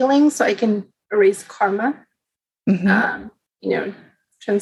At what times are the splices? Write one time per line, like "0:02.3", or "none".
0:03.5